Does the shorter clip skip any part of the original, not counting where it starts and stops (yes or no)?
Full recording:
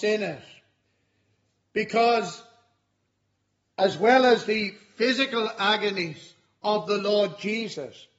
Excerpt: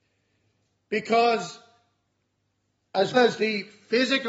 yes